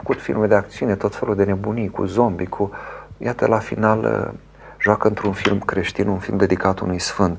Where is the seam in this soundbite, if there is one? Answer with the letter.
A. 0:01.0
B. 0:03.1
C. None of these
C